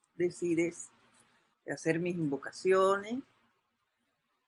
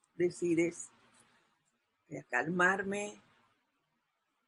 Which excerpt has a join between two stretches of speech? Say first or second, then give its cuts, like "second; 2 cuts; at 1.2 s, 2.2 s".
first; 1 cut; at 1.5 s